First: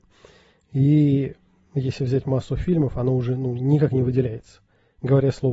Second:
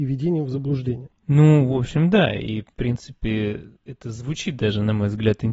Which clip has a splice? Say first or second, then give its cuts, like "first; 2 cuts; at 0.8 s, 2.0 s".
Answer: second; 1 cut; at 1.2 s